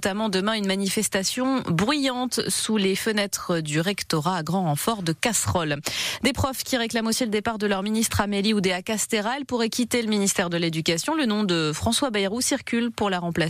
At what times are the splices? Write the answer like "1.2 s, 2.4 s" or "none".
none